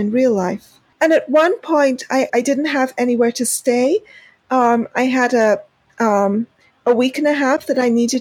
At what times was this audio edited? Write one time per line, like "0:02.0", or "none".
0:02.3